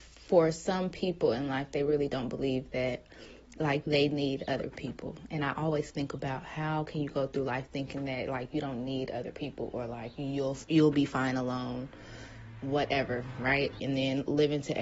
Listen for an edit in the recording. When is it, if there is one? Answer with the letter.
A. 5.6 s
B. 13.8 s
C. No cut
B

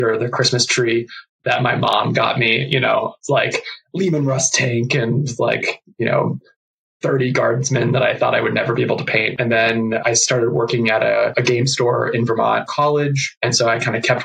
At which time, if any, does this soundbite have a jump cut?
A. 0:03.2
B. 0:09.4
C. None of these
B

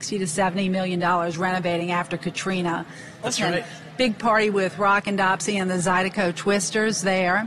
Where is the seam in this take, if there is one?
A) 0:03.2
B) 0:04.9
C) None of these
A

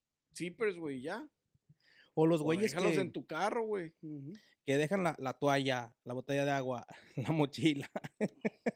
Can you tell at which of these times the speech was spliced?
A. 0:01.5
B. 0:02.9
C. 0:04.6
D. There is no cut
D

